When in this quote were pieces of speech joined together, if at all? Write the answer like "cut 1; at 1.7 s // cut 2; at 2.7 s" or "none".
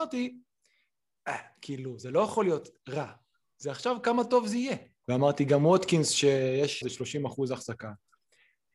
cut 1; at 5.0 s // cut 2; at 6.8 s